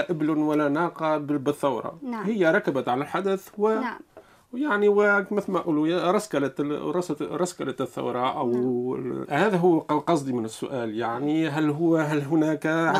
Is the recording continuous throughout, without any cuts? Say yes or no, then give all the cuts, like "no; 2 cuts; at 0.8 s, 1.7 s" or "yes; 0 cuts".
no; 1 cut; at 9.2 s